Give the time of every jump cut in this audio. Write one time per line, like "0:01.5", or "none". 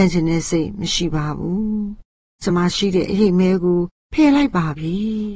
0:02.5